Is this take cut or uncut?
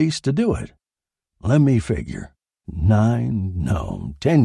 cut